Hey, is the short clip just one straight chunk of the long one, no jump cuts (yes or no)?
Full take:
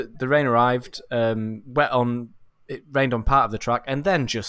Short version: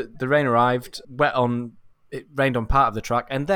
no